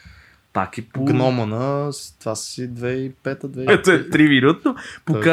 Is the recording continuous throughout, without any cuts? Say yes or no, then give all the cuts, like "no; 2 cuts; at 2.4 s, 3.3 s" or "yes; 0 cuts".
no; 1 cut; at 3.7 s